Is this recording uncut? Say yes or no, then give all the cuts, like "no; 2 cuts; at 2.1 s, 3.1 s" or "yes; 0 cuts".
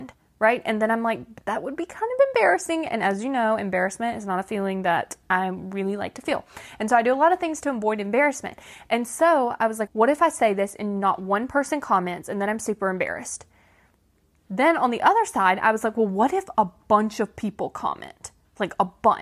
no; 1 cut; at 9.9 s